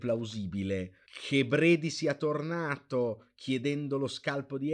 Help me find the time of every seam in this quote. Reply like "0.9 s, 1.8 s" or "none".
1.0 s